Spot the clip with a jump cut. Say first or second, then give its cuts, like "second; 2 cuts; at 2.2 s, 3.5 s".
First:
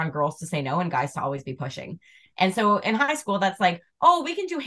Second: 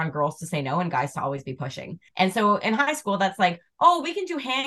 second; 1 cut; at 2.1 s